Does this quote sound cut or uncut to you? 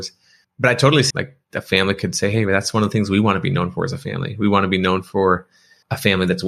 cut